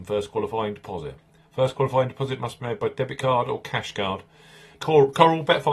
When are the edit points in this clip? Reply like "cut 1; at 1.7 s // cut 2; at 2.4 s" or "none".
cut 1; at 4.7 s